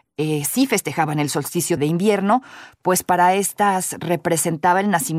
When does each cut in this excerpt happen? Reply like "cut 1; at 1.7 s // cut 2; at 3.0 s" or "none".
cut 1; at 1.8 s